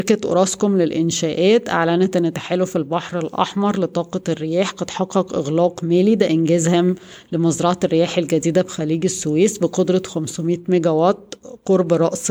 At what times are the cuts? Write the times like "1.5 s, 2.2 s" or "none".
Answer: none